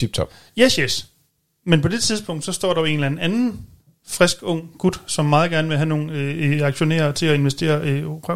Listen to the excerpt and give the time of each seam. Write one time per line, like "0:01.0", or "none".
none

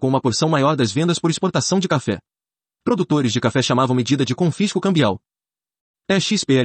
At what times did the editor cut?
none

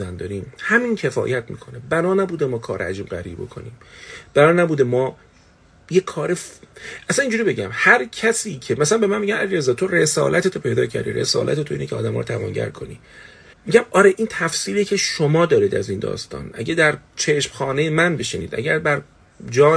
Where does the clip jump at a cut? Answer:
0:13.5

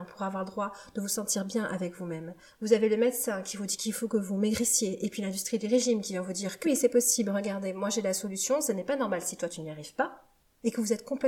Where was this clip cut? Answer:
0:06.6

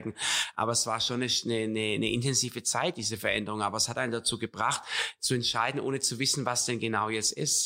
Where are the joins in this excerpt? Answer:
none

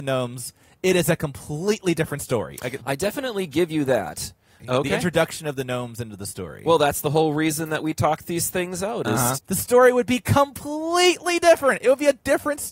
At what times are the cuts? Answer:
0:02.8
0:04.6
0:09.3

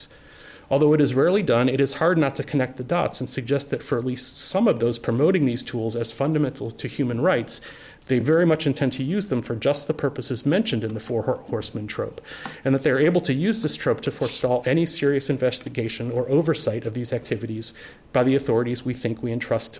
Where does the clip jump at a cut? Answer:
none

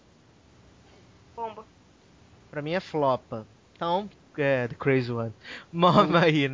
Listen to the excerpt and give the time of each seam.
0:04.1

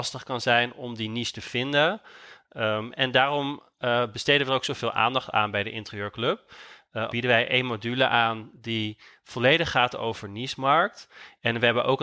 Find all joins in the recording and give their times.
0:07.1

